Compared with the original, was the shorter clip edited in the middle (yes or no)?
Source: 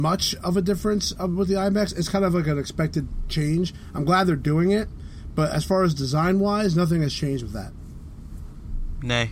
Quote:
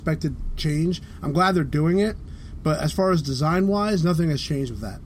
no